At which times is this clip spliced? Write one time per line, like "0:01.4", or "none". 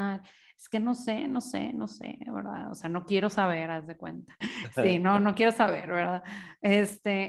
0:04.4